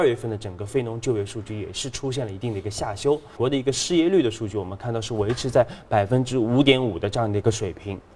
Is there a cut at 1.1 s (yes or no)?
no